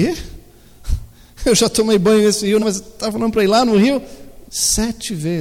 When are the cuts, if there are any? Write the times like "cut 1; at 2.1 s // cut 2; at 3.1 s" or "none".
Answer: cut 1; at 2.6 s // cut 2; at 4.5 s

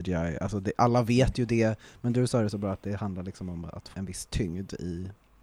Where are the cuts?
cut 1; at 3.9 s

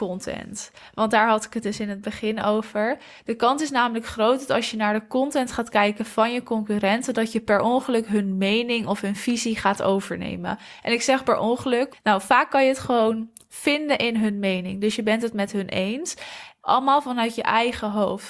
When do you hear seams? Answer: cut 1; at 11.9 s // cut 2; at 16.6 s

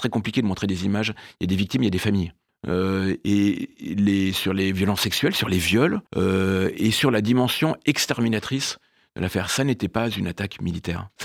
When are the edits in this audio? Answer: cut 1; at 2.5 s // cut 2; at 6.1 s

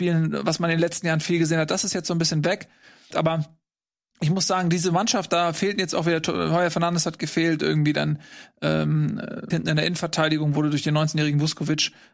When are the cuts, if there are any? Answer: cut 1; at 3.1 s // cut 2; at 9.5 s

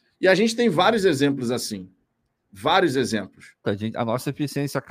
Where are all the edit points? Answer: cut 1; at 3.6 s

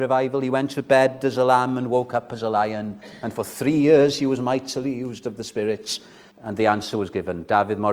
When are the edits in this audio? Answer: cut 1; at 6.3 s

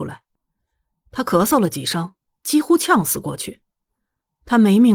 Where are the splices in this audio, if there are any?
none

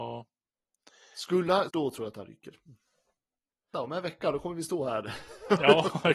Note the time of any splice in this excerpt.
cut 1; at 1.7 s // cut 2; at 3.7 s

